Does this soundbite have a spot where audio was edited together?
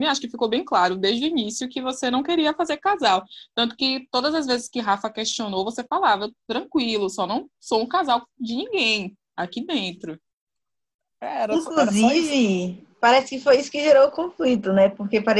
yes; 1 cut; at 12.9 s

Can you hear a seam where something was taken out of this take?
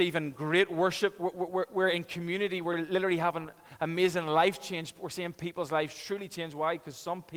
no; 0 cuts

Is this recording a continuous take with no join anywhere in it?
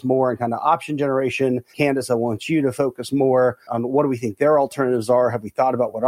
yes; 0 cuts

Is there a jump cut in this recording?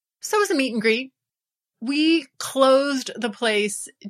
no; 0 cuts

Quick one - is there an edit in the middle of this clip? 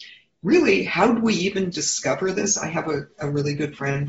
no; 0 cuts

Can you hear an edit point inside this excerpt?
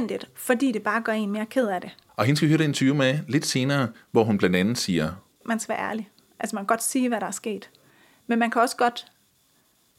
yes; 1 cut; at 2.1 s

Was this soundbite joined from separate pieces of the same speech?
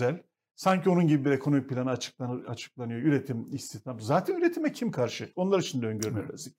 yes; 1 cut; at 5.3 s

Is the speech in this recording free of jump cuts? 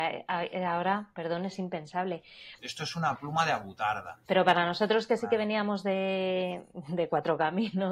no; 2 cuts; at 2.6 s, 4.3 s

